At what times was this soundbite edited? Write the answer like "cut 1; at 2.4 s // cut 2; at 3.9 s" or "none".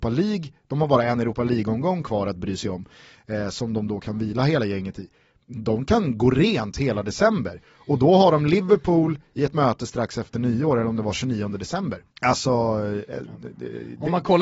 cut 1; at 12.1 s

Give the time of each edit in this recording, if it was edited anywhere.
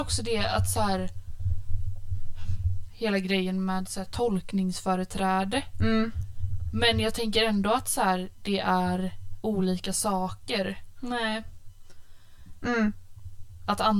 cut 1; at 2.9 s // cut 2; at 10.9 s // cut 3; at 12.6 s

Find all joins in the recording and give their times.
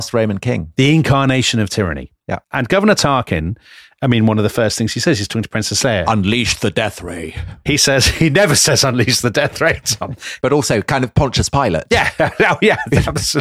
cut 1; at 7.7 s // cut 2; at 10.4 s

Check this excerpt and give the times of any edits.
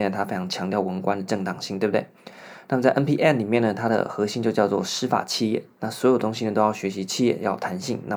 none

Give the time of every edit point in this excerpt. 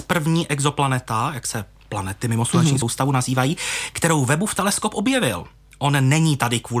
none

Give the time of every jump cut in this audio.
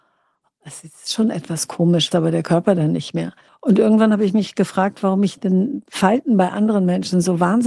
cut 1; at 2.1 s // cut 2; at 3.5 s

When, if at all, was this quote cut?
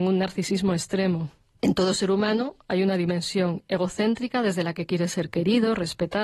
cut 1; at 1.6 s

